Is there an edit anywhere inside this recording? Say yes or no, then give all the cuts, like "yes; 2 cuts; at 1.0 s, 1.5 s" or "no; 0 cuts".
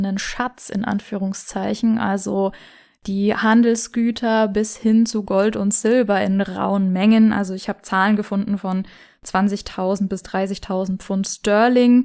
no; 0 cuts